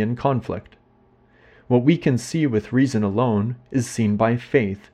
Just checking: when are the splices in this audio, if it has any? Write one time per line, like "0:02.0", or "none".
none